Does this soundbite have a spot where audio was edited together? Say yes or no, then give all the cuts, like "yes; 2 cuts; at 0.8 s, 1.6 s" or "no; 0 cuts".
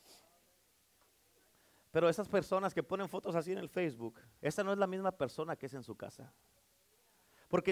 yes; 1 cut; at 4.4 s